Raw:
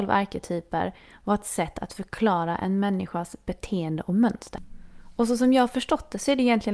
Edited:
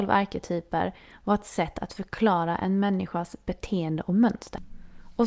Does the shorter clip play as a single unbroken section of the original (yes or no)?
yes